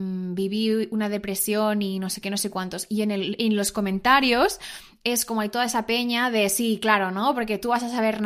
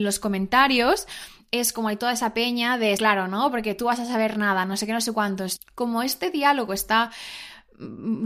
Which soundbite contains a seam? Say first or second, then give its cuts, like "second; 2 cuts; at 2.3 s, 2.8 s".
second; 2 cuts; at 3.0 s, 5.6 s